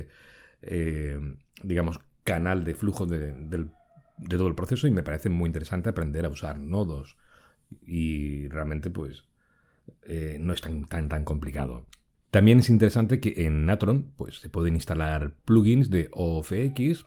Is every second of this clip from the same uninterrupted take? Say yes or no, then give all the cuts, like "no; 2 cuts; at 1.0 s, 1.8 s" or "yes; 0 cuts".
yes; 0 cuts